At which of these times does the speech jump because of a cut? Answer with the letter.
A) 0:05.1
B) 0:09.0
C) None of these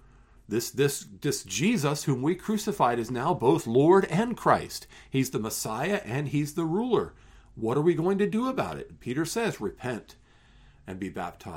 C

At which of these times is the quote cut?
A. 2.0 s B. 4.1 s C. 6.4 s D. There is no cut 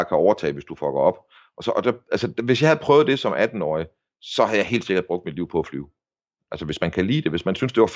C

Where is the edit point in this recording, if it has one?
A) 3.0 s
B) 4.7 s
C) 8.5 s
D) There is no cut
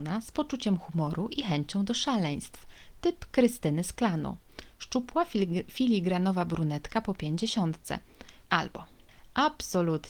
C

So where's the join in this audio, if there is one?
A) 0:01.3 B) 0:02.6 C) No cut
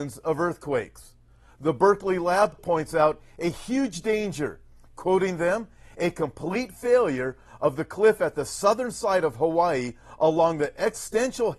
B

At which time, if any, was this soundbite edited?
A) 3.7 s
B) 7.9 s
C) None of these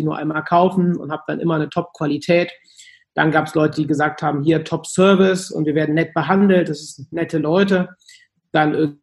C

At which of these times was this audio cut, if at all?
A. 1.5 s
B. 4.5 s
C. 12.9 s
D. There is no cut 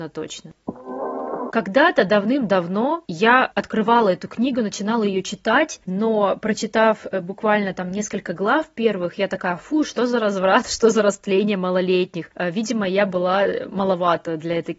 A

